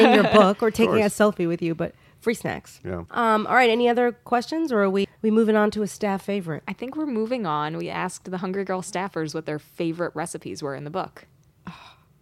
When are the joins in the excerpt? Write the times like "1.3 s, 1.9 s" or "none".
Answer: 5.0 s